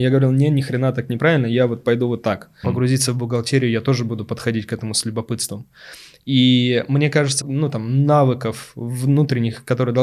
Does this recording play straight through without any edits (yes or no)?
no